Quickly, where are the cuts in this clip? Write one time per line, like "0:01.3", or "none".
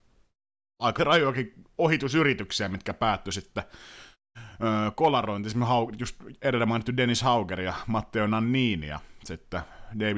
0:01.0